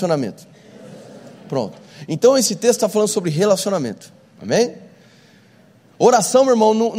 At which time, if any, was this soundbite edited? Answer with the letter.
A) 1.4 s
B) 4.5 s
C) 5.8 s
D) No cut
D